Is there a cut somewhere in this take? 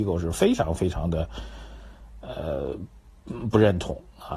no; 0 cuts

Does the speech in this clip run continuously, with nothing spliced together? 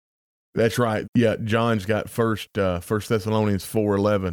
no; 1 cut; at 1.0 s

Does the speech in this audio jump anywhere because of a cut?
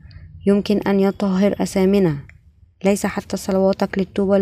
no; 0 cuts

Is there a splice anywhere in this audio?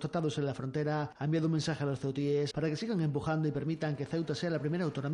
yes; 1 cut; at 2.5 s

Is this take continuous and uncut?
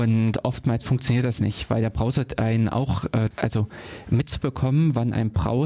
no; 1 cut; at 3.3 s

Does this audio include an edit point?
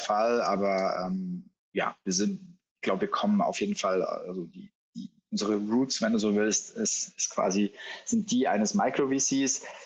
no; 0 cuts

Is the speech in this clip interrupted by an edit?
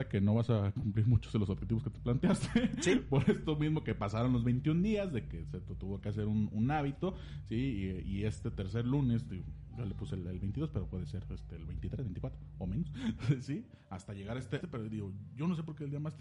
yes; 2 cuts; at 13.2 s, 14.6 s

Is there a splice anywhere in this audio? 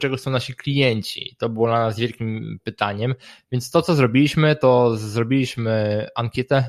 no; 0 cuts

